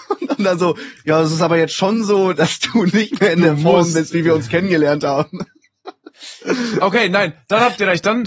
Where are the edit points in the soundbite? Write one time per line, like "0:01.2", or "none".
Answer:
none